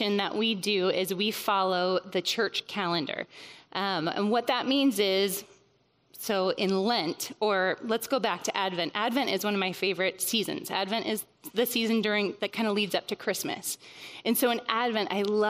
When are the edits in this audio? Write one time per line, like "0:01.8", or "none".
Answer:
none